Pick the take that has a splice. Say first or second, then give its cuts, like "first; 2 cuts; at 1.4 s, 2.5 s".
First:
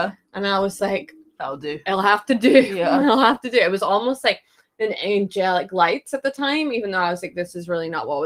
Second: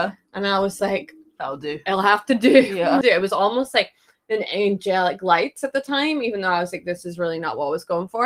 second; 1 cut; at 3.0 s